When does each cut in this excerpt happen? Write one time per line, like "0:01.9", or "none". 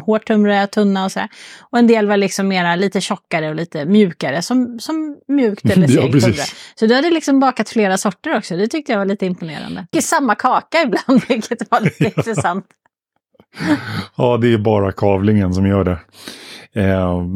0:09.9